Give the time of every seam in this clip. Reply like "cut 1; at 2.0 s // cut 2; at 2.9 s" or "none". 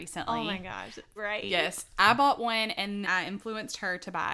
cut 1; at 1.2 s // cut 2; at 3.0 s